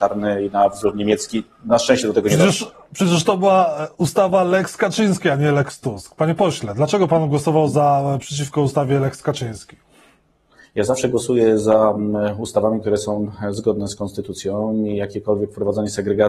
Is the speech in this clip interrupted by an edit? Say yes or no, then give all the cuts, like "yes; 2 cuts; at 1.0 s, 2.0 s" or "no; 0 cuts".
no; 0 cuts